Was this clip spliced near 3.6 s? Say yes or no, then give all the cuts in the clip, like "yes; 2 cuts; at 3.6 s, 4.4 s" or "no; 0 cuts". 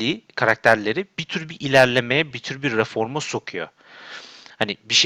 no; 1 cut; at 2.3 s